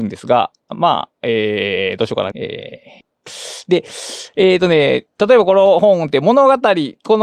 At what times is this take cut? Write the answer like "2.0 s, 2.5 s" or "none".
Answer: 2.3 s, 5.2 s